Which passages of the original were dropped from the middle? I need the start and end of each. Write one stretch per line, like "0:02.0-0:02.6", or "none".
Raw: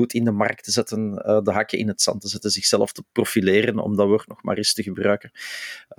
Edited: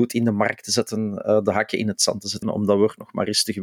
0:02.4-0:03.7